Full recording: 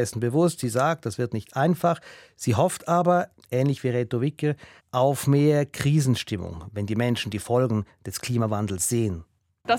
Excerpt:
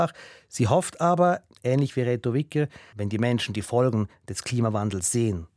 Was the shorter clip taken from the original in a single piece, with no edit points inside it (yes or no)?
no